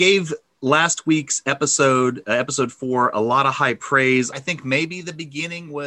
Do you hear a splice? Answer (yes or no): yes